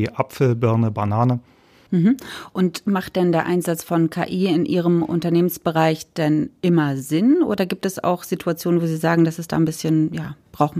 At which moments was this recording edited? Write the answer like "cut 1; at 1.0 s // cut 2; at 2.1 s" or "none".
cut 1; at 1.9 s